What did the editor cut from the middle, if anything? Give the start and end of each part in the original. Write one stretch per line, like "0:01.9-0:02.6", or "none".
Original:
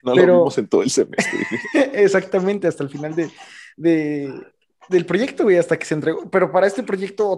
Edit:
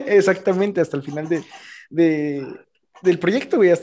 none